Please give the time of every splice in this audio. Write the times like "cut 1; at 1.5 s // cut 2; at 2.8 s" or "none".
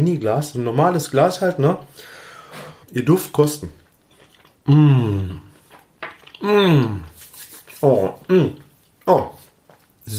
cut 1; at 2.8 s